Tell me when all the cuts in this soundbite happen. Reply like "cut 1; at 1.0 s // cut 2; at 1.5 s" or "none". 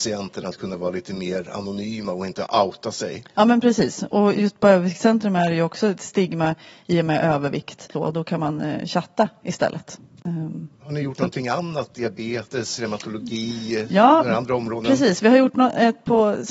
cut 1; at 7.9 s